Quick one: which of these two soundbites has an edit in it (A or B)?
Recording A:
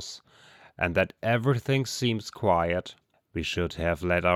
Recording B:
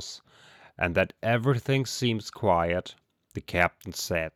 A